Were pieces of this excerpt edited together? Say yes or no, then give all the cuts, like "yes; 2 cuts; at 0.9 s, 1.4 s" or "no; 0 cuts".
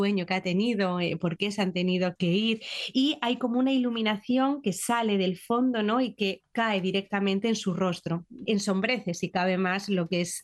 yes; 2 cuts; at 2.2 s, 8.5 s